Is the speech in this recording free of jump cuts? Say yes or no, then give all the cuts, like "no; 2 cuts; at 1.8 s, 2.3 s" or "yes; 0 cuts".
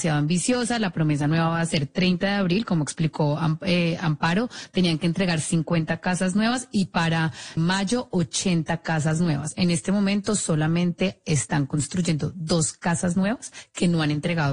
no; 1 cut; at 7.6 s